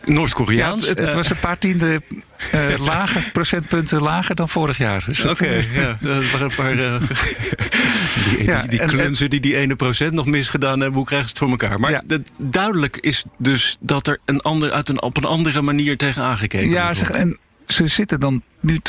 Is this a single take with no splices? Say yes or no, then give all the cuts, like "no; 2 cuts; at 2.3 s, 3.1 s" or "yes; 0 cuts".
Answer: no; 2 cuts; at 1.0 s, 17.1 s